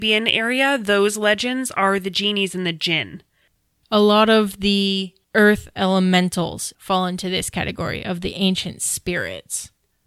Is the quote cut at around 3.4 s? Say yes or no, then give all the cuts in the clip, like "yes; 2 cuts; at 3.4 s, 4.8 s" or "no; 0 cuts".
no; 0 cuts